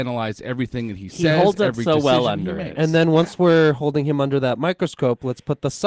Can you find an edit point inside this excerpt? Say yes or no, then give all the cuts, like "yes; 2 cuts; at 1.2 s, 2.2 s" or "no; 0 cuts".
no; 0 cuts